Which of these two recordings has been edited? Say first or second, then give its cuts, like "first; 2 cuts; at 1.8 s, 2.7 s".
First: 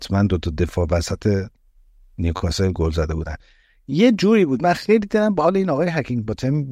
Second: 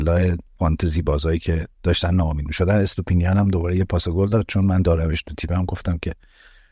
second; 1 cut; at 1.7 s